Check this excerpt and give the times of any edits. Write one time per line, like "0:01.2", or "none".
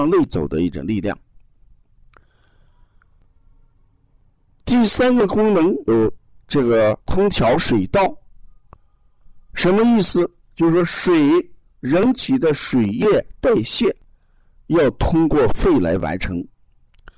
0:05.9
0:07.0